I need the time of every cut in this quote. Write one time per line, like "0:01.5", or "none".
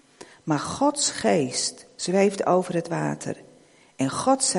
none